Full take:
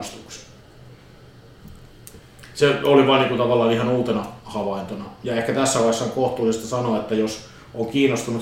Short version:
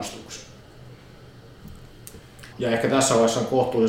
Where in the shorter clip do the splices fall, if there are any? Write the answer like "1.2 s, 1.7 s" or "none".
2.5 s